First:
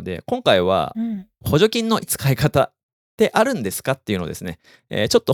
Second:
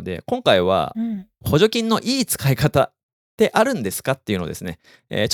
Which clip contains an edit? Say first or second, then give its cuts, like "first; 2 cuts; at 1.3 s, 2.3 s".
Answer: first; 1 cut; at 2.0 s